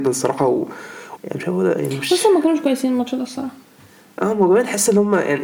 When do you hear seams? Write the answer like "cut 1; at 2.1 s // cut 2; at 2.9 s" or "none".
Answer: cut 1; at 1.2 s